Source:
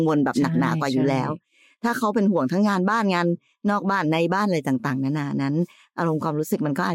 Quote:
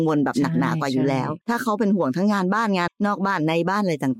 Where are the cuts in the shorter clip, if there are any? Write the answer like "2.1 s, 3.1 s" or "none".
1.4 s, 2.9 s